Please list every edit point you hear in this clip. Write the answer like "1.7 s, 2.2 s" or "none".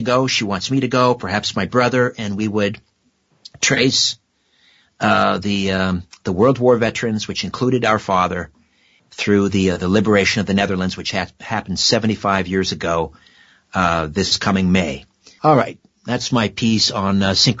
15.4 s